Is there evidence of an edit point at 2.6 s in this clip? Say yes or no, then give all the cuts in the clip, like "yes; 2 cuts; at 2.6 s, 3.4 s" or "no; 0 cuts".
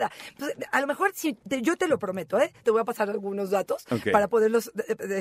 yes; 2 cuts; at 1.4 s, 2.6 s